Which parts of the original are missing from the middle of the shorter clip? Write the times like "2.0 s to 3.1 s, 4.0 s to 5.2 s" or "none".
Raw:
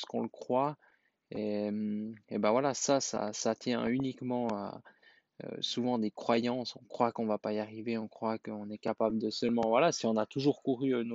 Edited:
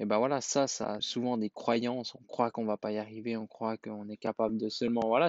3.3 s to 5.6 s